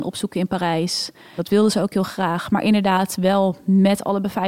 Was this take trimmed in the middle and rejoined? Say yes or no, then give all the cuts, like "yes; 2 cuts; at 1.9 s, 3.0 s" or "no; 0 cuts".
yes; 1 cut; at 1.4 s